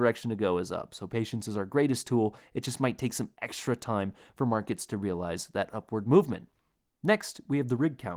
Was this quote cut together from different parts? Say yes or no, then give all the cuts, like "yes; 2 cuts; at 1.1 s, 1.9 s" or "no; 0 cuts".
no; 0 cuts